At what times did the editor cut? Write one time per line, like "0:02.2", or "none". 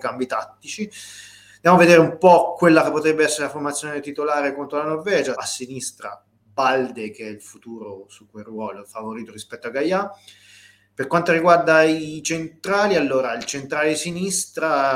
0:05.3